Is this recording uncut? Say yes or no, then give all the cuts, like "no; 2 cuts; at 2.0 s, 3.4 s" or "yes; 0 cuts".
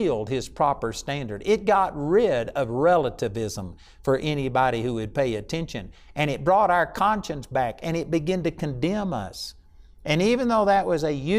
yes; 0 cuts